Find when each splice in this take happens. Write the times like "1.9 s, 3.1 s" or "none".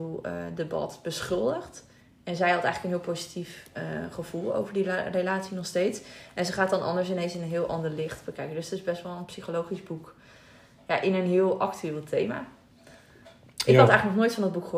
none